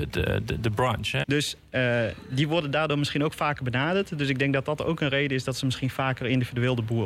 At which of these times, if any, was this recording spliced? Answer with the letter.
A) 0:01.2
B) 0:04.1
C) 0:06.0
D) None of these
A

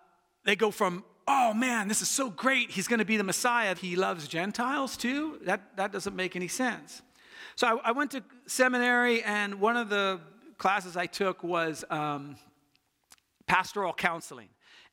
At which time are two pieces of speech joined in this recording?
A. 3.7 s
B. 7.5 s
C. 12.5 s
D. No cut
A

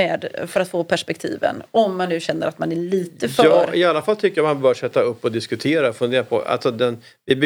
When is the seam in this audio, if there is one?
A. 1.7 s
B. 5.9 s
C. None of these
C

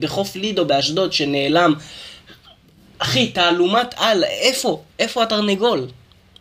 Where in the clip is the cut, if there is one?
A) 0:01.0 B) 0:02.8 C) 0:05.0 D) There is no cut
D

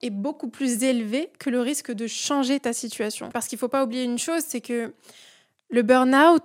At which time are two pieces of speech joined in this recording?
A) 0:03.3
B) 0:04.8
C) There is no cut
A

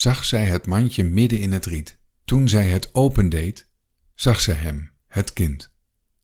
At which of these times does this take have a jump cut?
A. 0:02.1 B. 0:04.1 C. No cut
A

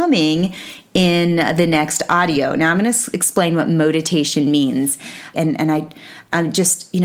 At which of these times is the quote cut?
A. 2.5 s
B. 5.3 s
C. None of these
B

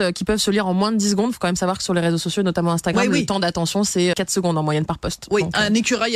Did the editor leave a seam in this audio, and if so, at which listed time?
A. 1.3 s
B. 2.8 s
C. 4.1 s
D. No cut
C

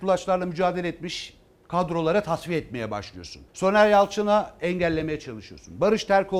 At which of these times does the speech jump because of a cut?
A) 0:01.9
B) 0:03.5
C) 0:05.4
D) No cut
B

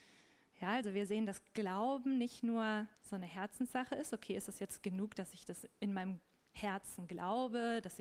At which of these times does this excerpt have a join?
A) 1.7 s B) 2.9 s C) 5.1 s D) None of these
B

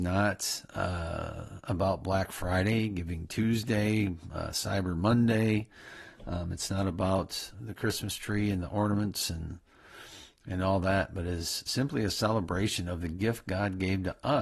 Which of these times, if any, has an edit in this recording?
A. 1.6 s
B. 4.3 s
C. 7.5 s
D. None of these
C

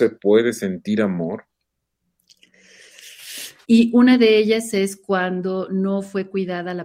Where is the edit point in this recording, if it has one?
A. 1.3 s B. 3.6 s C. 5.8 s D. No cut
B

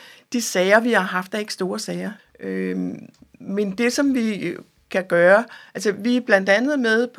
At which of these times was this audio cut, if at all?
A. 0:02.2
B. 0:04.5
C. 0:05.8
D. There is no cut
A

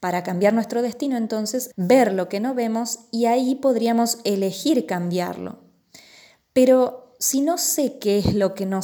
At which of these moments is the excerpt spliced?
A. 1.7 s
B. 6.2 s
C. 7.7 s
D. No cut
A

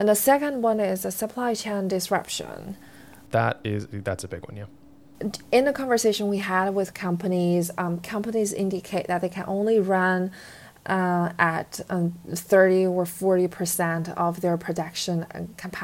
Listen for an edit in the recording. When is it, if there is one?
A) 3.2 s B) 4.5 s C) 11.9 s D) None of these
D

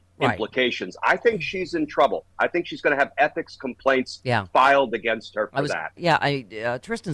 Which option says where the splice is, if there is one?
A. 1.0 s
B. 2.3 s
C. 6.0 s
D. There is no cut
C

